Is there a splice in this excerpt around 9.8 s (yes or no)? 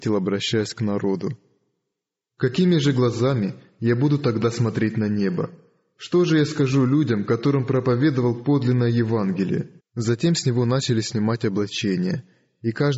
yes